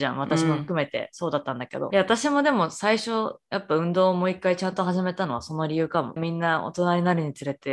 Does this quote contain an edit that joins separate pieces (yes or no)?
yes